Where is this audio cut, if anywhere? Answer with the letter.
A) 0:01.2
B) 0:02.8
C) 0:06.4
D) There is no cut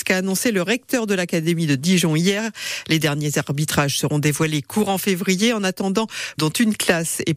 C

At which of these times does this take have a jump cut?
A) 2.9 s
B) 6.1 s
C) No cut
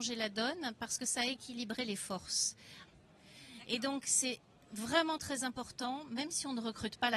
A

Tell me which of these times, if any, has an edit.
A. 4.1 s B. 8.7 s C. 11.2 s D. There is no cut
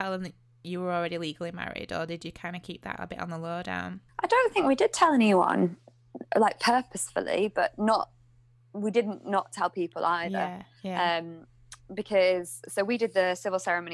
A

